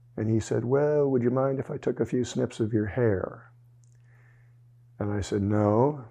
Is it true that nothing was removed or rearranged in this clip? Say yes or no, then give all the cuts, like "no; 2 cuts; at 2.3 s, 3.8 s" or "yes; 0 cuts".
yes; 0 cuts